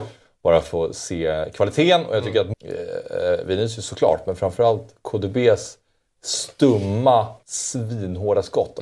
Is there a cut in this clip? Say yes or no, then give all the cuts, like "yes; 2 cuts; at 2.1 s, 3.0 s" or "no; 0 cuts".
yes; 2 cuts; at 2.5 s, 7.4 s